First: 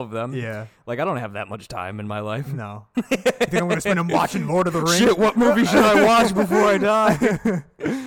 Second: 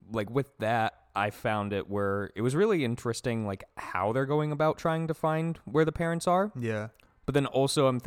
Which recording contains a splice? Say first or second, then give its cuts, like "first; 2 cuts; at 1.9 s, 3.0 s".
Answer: first; 1 cut; at 2.9 s